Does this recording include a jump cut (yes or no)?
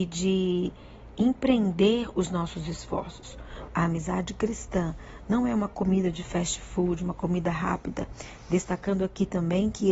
yes